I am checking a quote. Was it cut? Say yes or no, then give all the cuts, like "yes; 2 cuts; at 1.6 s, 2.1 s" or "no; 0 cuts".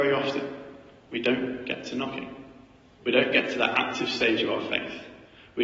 no; 0 cuts